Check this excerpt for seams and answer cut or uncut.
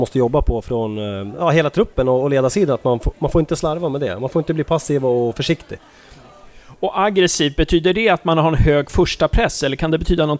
uncut